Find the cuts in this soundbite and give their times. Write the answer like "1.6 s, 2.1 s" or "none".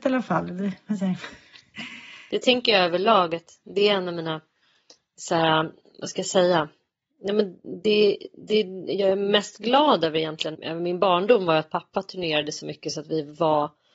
10.5 s